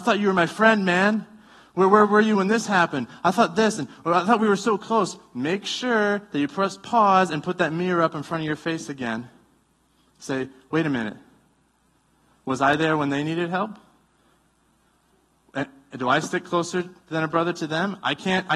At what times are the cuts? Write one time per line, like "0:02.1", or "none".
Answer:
none